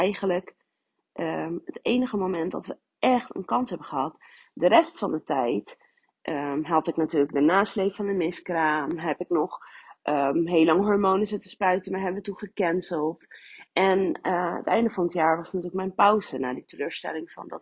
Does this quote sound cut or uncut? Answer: uncut